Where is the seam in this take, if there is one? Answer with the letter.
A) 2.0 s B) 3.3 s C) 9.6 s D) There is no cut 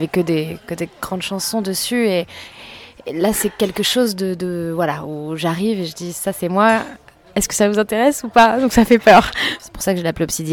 C